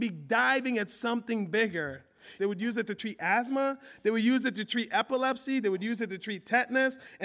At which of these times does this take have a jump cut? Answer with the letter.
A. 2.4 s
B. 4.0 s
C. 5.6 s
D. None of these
A